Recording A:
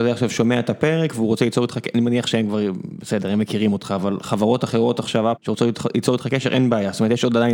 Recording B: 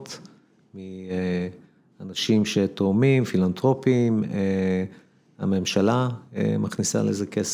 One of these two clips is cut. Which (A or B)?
A